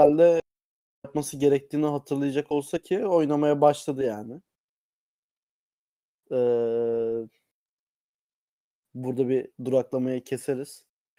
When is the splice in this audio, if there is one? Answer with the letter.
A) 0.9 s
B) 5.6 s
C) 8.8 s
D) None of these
D